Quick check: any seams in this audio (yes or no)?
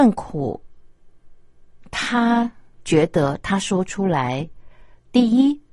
no